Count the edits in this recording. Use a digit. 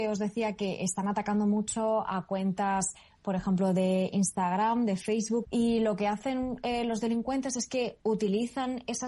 1